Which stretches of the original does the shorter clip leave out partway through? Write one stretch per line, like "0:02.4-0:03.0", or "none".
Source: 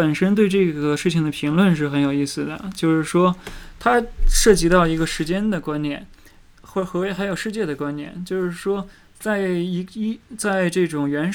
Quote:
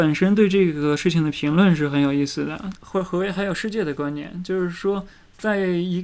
0:02.7-0:06.6

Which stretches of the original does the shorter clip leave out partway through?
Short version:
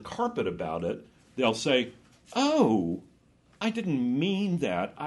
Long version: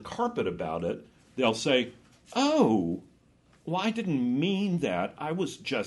0:03.6-0:03.8

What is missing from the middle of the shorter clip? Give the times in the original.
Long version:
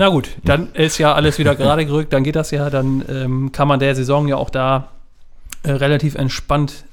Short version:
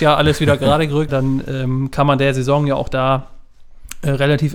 0:02.1-0:02.7

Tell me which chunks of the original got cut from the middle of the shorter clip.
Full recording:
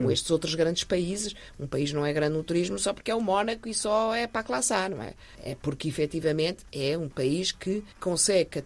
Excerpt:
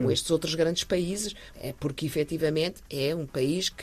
0:01.5-0:05.4

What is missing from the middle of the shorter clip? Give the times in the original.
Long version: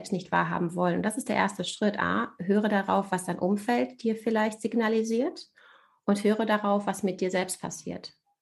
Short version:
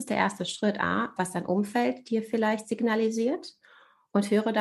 0:02.4-0:03.1

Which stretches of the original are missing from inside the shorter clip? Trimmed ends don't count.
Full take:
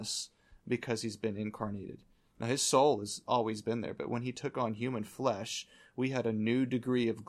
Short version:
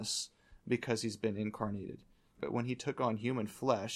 0:02.4-0:04.0

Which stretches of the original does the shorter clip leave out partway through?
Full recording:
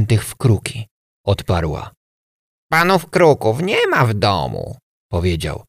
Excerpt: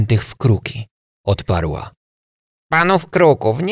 none

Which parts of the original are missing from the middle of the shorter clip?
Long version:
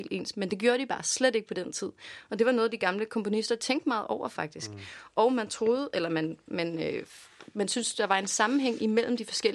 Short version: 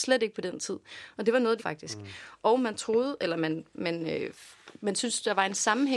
0:02.7-0:04.3

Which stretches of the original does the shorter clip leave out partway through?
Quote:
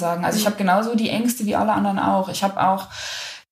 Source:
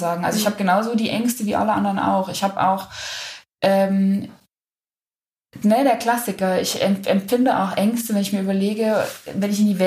none

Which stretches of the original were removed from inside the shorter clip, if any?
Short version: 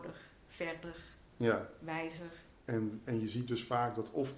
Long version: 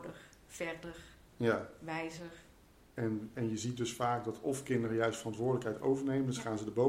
0:02.6-0:02.9

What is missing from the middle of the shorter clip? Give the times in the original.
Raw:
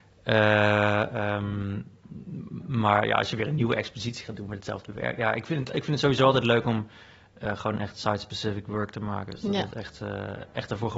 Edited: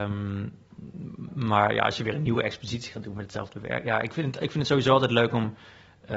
none

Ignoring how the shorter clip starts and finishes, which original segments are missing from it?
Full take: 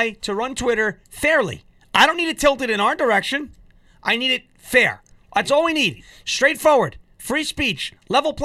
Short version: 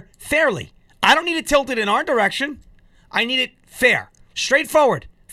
0:05.2-0:06.2

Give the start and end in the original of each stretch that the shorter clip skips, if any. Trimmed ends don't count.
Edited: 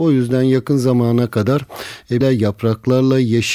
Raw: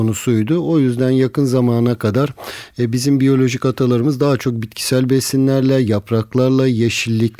0:02.9-0:05.7

